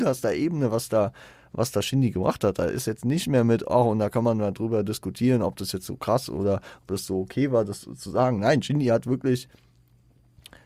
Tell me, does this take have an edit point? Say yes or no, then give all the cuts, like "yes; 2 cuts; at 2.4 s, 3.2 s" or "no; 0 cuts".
no; 0 cuts